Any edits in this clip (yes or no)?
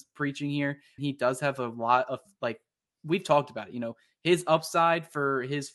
yes